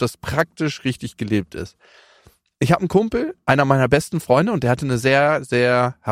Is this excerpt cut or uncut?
uncut